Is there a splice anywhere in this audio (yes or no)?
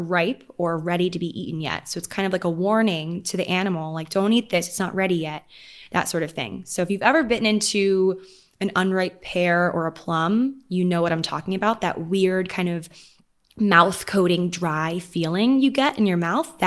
no